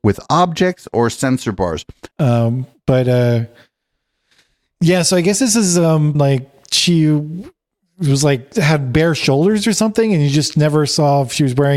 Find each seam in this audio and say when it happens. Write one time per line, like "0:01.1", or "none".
0:02.1
0:06.1